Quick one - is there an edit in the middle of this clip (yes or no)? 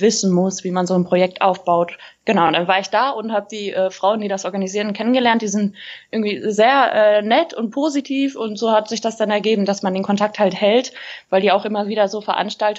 no